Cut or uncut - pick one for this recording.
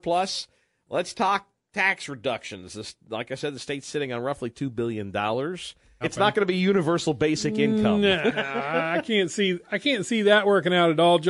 cut